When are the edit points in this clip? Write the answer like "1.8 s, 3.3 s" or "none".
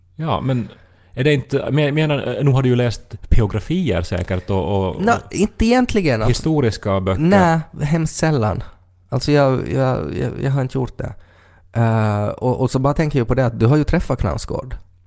none